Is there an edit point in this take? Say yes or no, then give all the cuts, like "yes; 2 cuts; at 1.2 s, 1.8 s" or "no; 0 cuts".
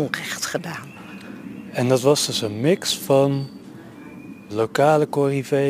yes; 1 cut; at 4.5 s